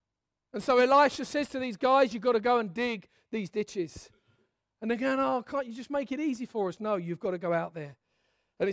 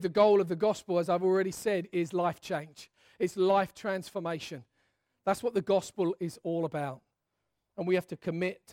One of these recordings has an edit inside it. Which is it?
first; 1 cut; at 1.8 s

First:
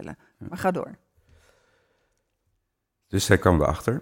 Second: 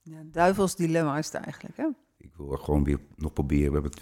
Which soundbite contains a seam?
second; 1 cut; at 2.2 s

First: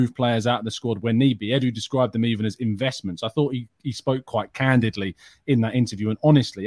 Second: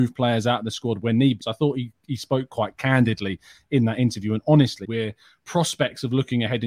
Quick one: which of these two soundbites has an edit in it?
second; 2 cuts; at 1.4 s, 4.8 s

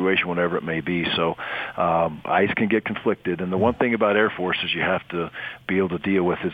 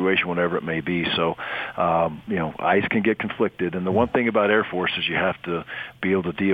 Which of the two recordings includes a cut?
first; 1 cut; at 2.2 s

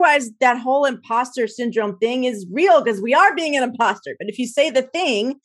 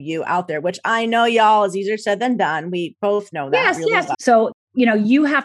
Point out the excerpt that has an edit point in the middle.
second; 1 cut; at 4.1 s

